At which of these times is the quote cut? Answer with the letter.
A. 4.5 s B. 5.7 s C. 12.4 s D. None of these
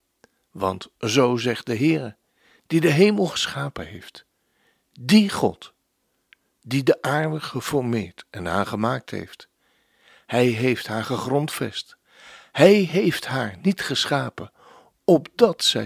D